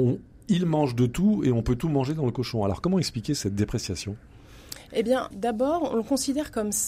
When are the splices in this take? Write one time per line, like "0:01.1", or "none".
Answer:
0:05.3